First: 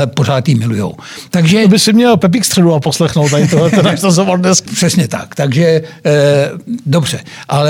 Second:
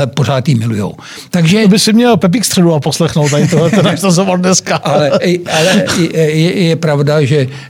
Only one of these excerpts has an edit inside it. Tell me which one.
first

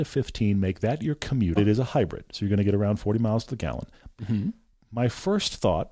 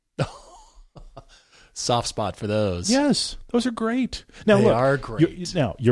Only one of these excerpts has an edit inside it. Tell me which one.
first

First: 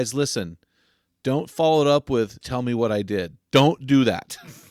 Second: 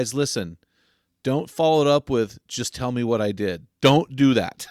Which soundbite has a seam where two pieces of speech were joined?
first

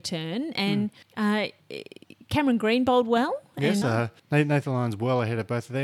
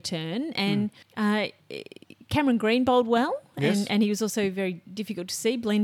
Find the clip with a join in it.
first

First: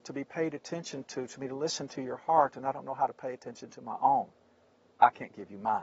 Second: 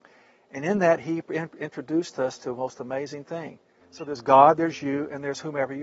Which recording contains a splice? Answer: second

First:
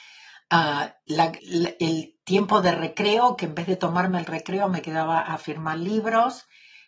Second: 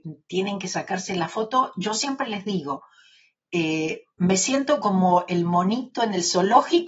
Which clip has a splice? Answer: first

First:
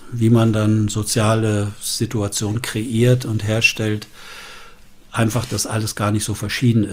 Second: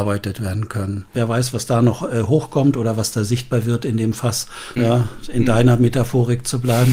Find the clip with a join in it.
second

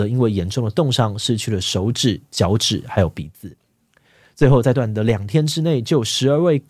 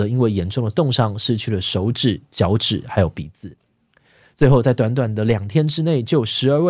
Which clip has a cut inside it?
first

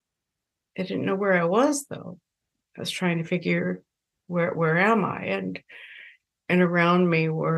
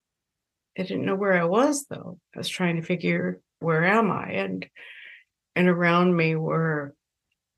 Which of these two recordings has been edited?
second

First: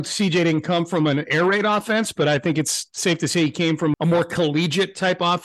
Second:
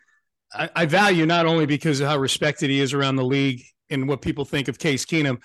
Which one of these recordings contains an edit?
first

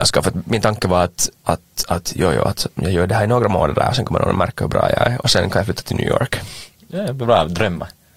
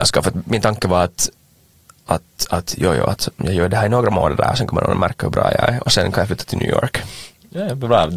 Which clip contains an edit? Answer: first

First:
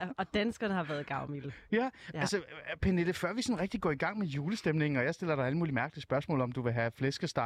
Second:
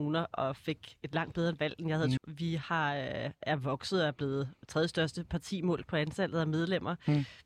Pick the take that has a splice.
second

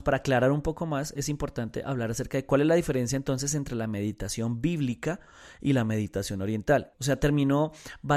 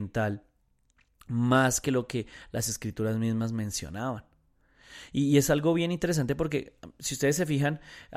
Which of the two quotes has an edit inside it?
first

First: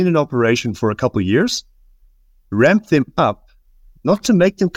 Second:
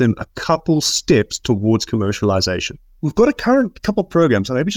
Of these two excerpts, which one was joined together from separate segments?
second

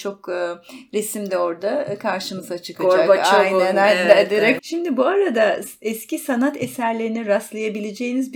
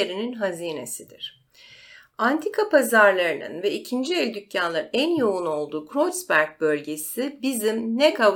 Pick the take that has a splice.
first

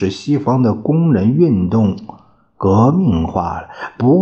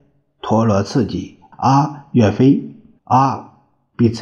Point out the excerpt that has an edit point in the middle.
second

